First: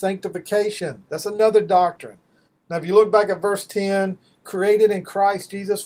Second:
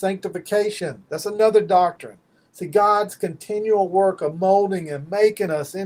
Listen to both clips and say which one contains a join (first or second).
first